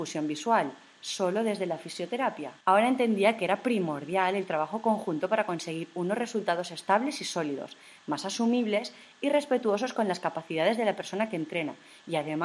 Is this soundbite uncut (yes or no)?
no